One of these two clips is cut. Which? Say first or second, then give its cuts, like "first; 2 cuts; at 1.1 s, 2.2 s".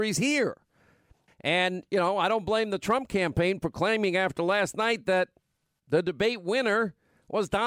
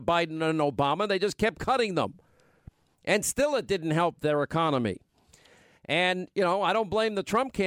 first; 1 cut; at 1.3 s